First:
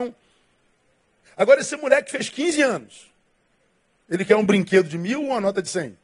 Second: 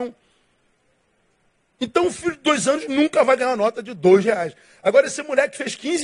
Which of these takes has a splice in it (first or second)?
first